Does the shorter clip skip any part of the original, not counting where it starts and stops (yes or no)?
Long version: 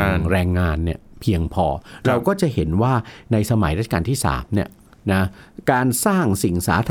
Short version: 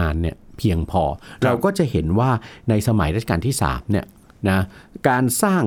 no